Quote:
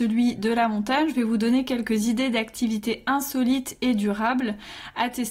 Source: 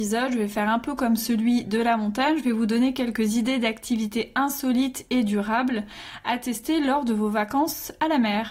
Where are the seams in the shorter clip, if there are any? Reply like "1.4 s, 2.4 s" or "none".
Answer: none